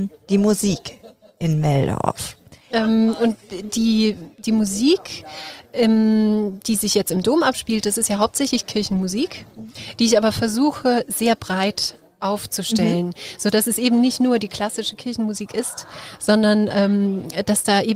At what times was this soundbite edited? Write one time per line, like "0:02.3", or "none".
0:02.7